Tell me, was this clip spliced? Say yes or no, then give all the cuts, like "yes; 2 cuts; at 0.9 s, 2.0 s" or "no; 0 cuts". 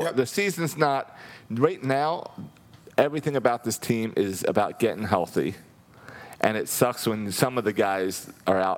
no; 0 cuts